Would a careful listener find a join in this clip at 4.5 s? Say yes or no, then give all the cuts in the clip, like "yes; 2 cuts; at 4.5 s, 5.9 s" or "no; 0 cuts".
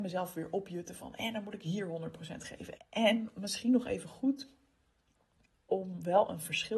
no; 1 cut; at 2.8 s